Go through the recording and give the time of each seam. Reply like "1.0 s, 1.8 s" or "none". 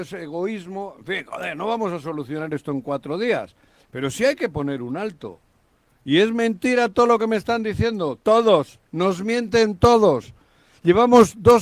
8.9 s